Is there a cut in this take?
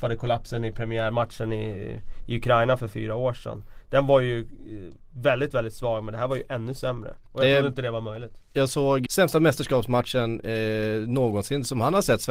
yes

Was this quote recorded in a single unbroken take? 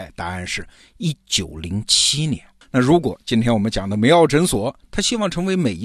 no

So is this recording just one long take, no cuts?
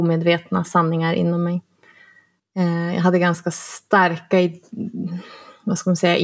no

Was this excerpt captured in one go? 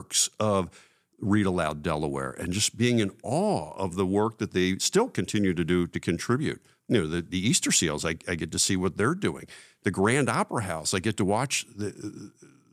yes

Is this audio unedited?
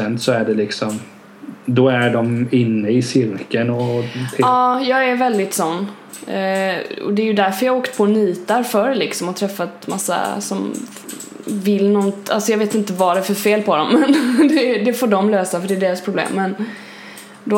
yes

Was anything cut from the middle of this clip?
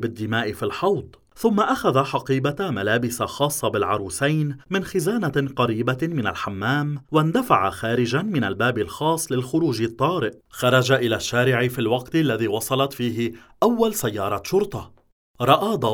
yes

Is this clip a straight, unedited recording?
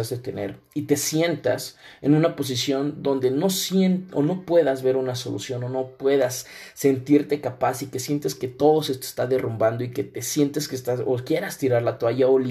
yes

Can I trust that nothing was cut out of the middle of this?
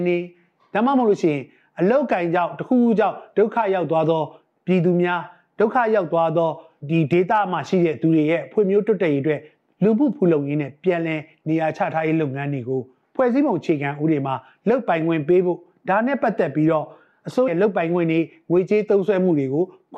no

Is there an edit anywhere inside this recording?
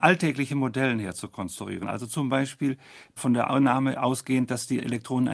no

